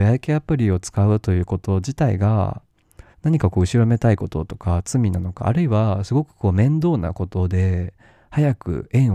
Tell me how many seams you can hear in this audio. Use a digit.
1